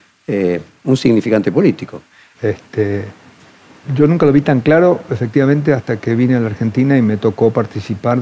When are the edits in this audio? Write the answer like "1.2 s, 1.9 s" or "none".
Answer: 2.3 s